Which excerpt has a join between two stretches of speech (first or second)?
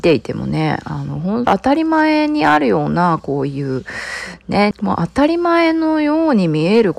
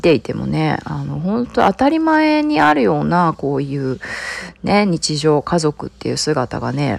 first